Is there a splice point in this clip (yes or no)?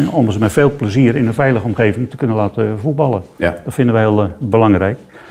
no